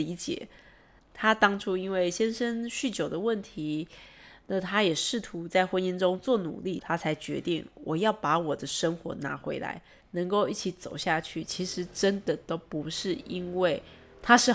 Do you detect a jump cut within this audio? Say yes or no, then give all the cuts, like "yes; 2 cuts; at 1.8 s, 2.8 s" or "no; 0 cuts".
yes; 3 cuts; at 1.0 s, 6.8 s, 10.0 s